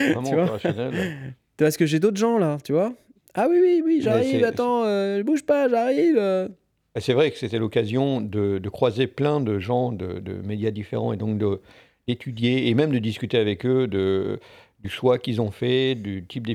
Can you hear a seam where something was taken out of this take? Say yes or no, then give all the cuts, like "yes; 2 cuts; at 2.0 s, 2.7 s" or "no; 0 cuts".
no; 0 cuts